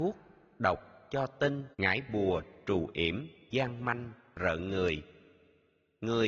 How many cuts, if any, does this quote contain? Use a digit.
1